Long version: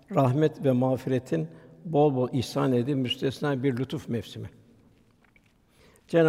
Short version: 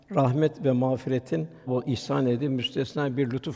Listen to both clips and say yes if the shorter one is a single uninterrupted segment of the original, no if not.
no